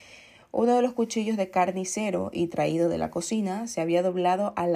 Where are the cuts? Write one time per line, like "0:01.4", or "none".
none